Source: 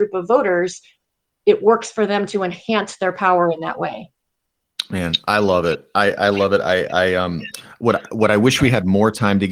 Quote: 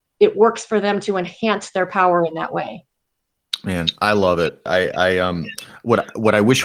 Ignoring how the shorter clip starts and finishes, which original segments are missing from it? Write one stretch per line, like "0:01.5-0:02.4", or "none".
0:05.9-0:06.6